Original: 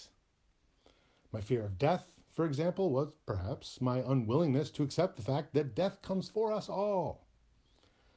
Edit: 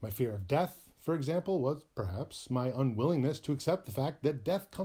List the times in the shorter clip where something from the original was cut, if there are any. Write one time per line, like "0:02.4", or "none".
none